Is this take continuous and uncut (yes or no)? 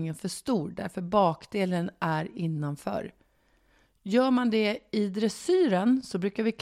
yes